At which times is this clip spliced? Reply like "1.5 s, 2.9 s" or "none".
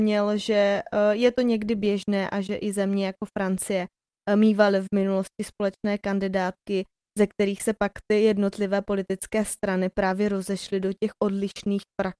none

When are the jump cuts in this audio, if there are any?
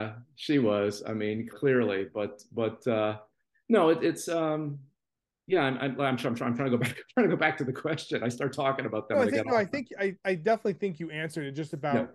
1.5 s

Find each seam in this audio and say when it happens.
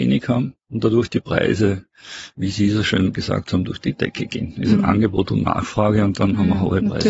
none

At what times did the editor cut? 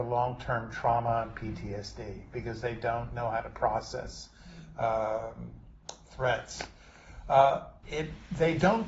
7.8 s

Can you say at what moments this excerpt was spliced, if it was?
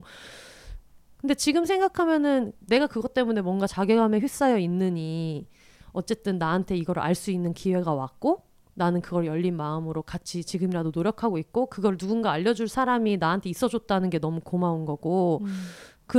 none

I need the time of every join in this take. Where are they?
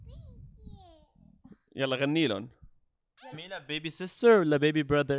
3.3 s

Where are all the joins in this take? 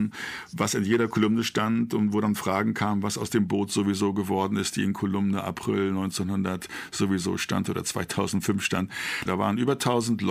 9.3 s

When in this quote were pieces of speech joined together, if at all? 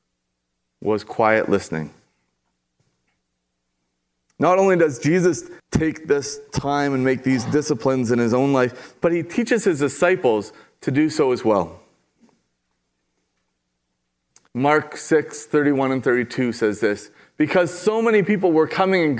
none

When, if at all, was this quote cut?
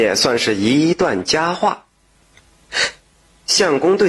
3.0 s

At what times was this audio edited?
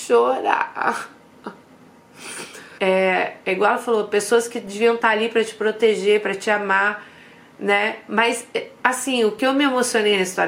2.8 s

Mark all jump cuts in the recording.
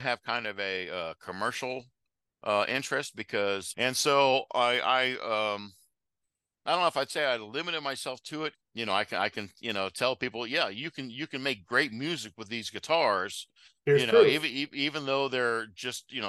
3.7 s, 8.5 s

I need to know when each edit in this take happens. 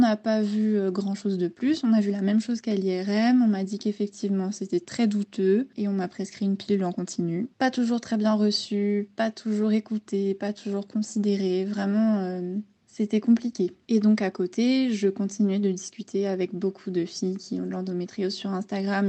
7.5 s

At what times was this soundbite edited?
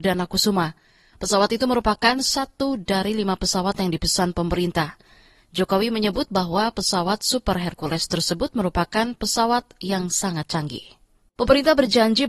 11.3 s

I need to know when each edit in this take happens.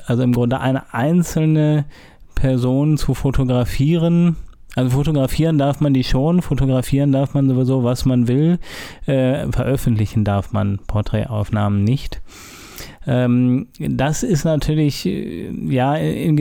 none

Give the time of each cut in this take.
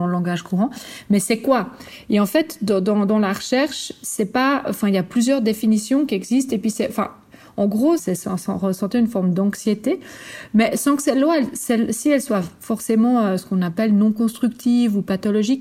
8.0 s

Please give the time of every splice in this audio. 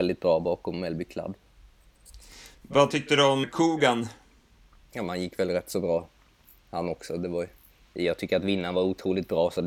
3.4 s

